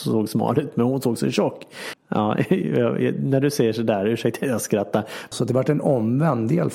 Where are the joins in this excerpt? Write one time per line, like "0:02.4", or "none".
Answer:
0:01.9
0:05.3